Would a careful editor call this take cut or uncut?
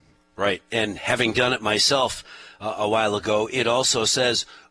uncut